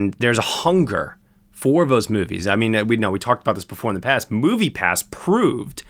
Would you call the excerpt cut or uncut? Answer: uncut